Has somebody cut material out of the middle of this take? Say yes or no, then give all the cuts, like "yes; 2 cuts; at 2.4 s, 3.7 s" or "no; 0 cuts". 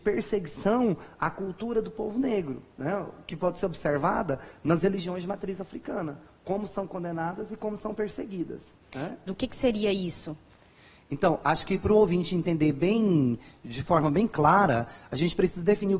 yes; 1 cut; at 9.3 s